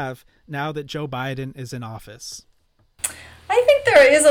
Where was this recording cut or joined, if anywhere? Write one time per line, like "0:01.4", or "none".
none